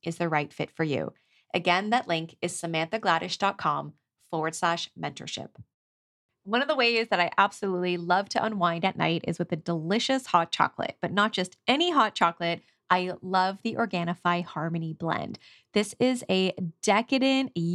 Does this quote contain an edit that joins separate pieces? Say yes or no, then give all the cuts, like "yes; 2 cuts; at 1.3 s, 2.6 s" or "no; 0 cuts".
no; 0 cuts